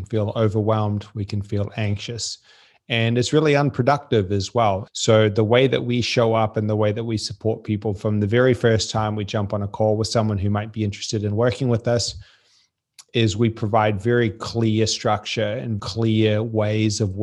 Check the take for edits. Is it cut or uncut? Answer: cut